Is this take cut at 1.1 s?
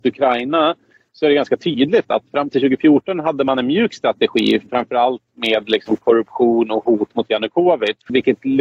no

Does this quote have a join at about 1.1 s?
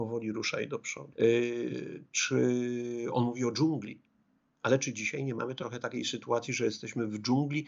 yes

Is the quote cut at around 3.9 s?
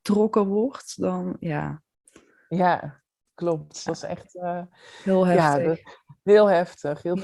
yes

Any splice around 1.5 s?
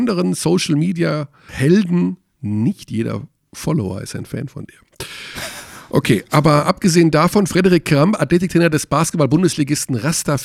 yes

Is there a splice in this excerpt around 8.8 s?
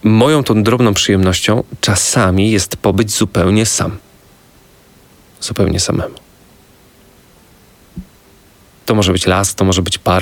yes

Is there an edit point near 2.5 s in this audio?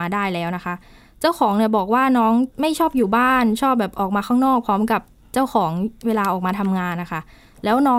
yes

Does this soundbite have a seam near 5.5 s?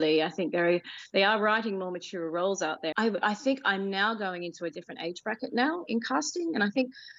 no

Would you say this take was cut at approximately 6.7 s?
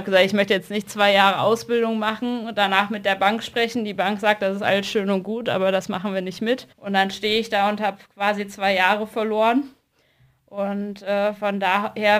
yes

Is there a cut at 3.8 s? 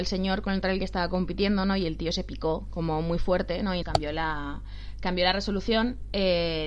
yes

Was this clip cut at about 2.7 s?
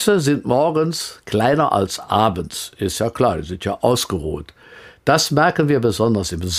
no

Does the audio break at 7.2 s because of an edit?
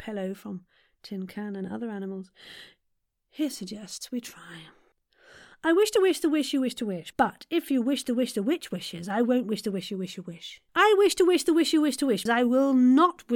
no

